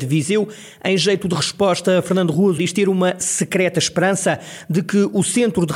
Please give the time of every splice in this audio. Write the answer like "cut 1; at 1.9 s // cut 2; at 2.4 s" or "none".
cut 1; at 2.6 s